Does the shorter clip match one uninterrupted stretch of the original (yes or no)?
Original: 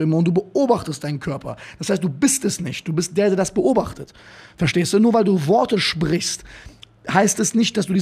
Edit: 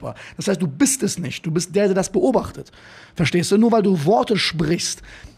yes